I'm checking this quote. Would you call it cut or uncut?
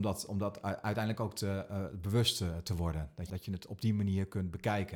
cut